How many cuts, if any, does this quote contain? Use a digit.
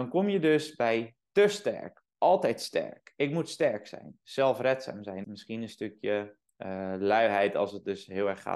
1